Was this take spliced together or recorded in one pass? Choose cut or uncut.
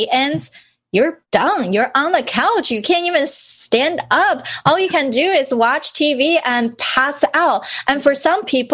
uncut